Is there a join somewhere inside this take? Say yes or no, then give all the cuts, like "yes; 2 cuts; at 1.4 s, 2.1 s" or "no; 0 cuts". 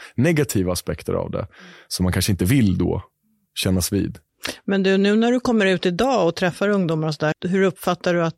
yes; 1 cut; at 7.3 s